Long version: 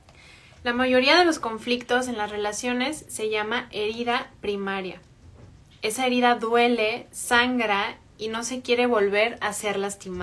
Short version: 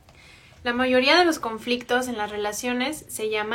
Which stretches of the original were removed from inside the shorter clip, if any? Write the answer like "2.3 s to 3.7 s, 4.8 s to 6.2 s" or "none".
none

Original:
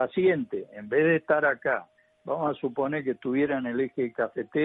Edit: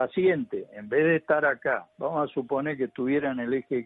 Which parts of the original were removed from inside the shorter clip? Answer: 1.9 s to 2.2 s

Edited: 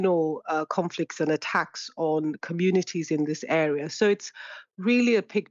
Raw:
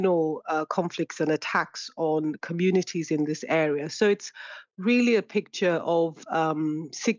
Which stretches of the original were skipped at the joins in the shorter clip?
none

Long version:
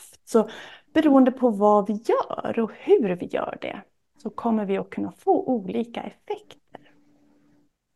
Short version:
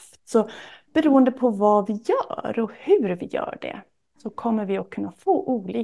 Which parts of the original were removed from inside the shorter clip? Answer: none

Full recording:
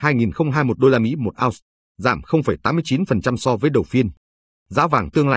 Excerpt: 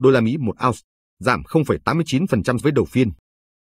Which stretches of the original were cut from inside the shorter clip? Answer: 3.4 s to 3.6 s

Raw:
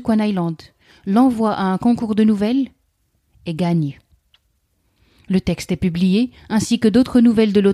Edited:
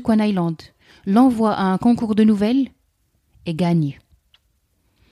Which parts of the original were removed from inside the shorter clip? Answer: none

